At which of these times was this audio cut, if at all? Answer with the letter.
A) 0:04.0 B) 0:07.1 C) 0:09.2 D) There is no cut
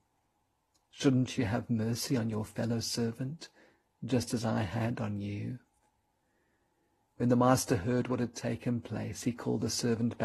B